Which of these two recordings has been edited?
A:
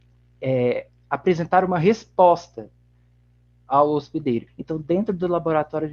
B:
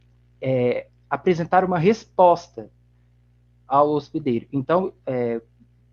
A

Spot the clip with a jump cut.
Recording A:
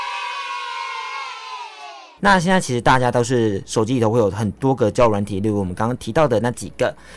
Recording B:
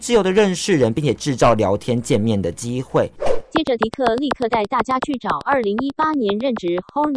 A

